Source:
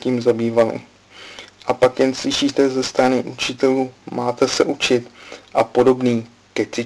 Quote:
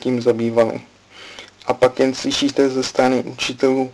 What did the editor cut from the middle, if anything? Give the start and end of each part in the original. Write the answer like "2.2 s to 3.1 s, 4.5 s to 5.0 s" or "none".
none